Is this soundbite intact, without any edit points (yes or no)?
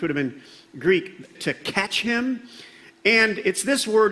no